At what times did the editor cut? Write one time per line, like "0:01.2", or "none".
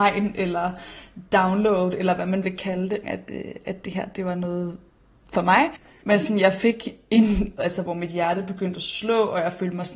0:03.0
0:06.0
0:07.6